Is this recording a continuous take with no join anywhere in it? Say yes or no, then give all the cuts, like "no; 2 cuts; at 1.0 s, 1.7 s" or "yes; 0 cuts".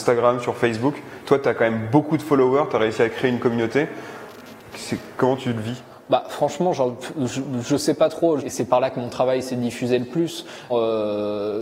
no; 2 cuts; at 8.4 s, 10.7 s